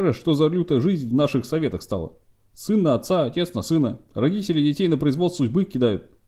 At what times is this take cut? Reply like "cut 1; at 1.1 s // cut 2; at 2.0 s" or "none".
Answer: none

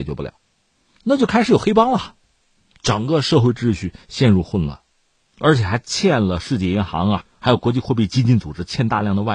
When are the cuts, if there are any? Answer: none

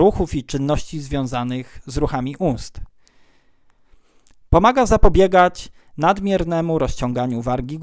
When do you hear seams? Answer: none

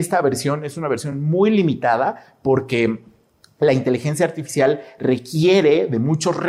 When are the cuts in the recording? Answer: none

